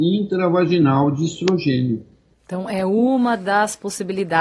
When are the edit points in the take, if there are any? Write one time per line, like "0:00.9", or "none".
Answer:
0:02.3